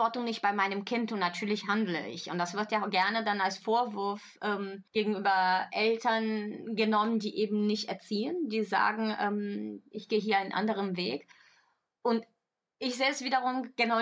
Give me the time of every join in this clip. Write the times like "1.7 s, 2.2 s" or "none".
4.9 s